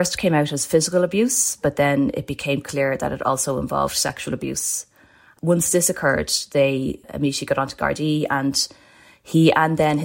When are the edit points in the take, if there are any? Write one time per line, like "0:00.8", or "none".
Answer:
none